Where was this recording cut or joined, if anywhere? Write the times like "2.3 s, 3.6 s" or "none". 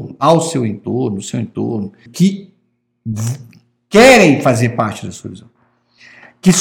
2.1 s